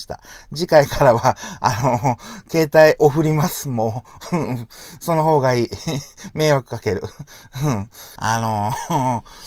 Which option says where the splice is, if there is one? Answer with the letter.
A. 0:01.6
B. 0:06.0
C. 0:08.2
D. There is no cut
C